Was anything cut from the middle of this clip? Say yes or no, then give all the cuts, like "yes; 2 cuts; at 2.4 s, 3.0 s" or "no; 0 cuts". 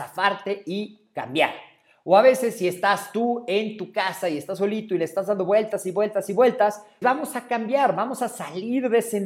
yes; 1 cut; at 7.0 s